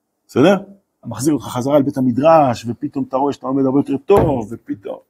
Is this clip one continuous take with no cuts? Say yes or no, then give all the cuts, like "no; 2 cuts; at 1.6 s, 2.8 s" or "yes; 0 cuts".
no; 1 cut; at 1.0 s